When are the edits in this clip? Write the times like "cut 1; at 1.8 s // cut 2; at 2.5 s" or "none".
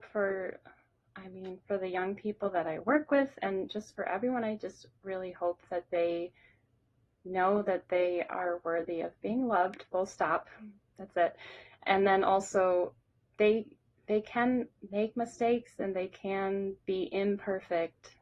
cut 1; at 13.3 s